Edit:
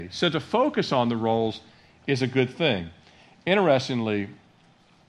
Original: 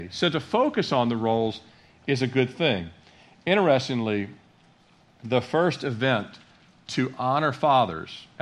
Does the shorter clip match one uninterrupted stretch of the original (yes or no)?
yes